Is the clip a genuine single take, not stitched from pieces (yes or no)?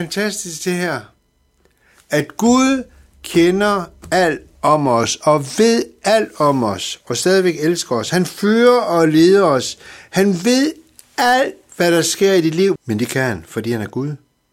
no